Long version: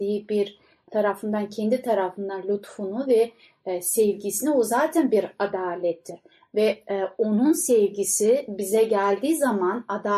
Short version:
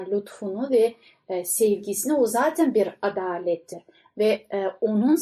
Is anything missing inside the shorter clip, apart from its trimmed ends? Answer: no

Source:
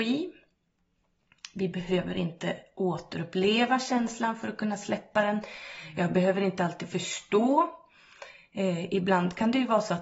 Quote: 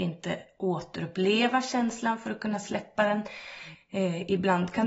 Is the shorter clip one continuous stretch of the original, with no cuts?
no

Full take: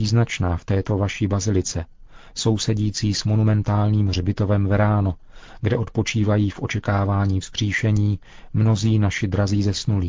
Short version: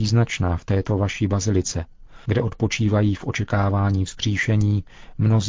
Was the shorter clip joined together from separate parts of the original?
yes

